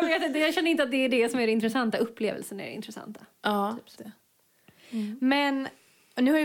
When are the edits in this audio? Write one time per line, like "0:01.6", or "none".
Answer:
0:04.0